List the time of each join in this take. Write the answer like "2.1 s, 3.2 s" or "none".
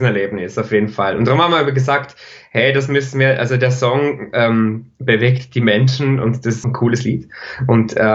6.6 s